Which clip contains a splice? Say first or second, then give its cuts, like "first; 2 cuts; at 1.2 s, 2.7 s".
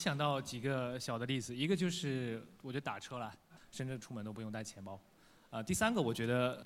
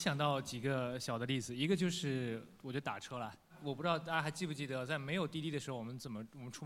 first; 1 cut; at 3.6 s